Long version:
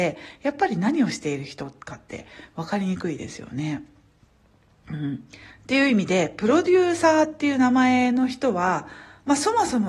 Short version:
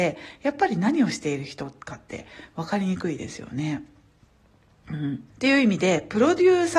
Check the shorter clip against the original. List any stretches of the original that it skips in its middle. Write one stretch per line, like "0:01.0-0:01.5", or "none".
0:05.3-0:05.6